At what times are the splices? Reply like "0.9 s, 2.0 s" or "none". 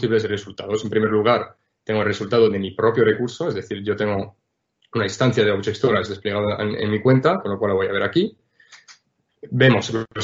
none